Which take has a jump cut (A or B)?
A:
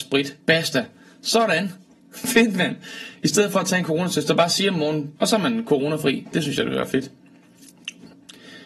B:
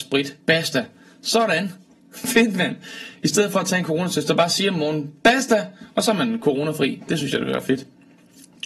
A